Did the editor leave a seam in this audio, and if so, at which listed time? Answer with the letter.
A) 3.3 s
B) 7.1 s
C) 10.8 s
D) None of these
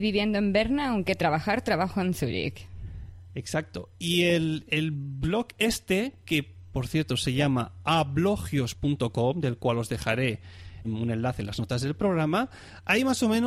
C